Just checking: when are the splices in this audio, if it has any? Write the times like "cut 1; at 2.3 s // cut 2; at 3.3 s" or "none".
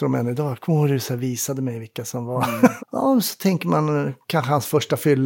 cut 1; at 2.8 s